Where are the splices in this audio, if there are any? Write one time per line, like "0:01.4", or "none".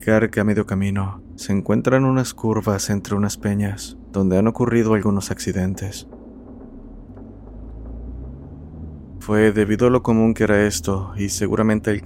0:01.4
0:09.1